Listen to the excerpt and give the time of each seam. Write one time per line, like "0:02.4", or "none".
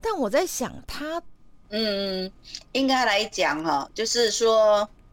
0:01.6